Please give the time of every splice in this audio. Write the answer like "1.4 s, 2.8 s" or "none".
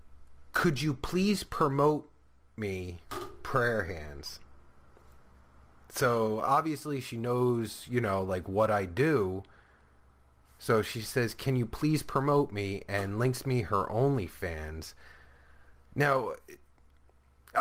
none